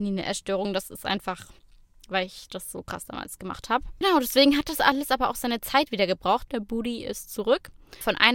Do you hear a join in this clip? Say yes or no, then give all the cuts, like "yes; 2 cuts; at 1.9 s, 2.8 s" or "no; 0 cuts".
no; 0 cuts